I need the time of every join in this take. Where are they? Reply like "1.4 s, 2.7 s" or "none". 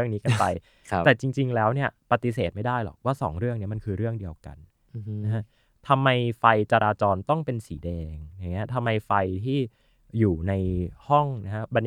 2.0 s